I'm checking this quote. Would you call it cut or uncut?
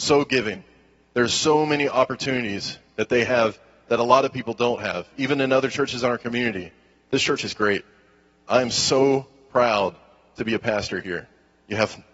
uncut